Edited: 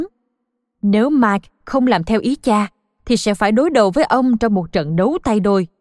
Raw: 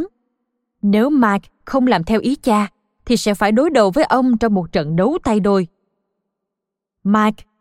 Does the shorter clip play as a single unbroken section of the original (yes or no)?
yes